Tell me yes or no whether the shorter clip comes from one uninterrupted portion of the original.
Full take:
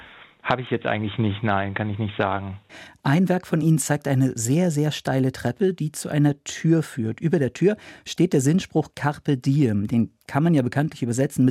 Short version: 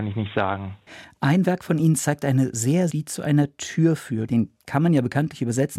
no